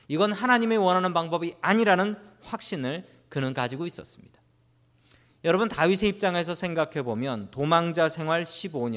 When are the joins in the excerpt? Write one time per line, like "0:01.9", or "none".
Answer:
none